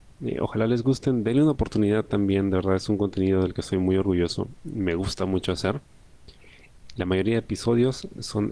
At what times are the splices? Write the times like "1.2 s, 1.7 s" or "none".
none